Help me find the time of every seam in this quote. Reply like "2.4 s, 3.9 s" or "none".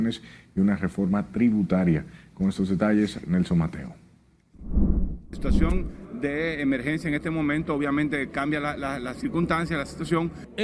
none